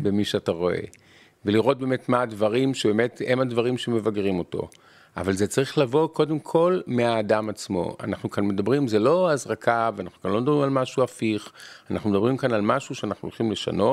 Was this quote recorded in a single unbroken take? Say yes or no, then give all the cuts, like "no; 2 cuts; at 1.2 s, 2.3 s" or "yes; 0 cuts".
yes; 0 cuts